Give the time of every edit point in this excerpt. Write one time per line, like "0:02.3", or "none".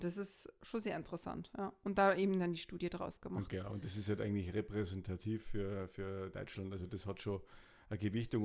none